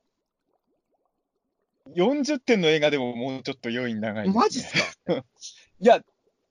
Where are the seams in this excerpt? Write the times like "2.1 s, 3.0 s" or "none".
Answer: 5.1 s